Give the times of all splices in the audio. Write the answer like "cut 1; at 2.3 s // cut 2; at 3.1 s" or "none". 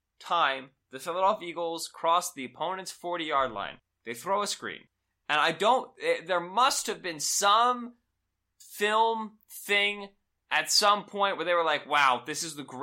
none

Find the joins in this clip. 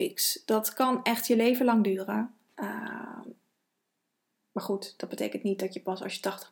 none

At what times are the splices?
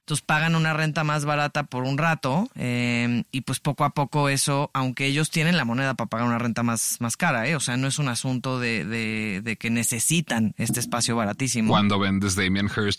none

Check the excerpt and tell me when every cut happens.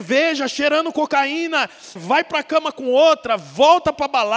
cut 1; at 2.0 s

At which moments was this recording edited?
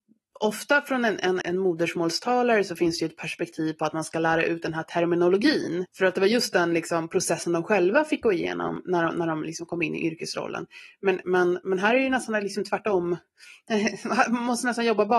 cut 1; at 1.4 s // cut 2; at 5.9 s

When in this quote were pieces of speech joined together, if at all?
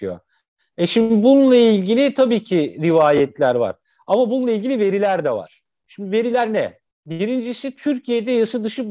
none

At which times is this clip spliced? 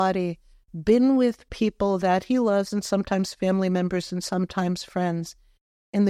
none

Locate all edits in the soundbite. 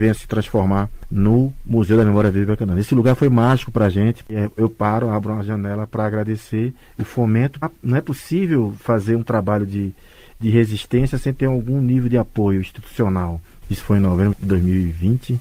cut 1; at 7.6 s // cut 2; at 13.6 s

